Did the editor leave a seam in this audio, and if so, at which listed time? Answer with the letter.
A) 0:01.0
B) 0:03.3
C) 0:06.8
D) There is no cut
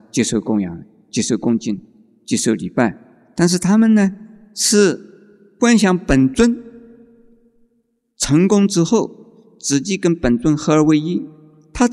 D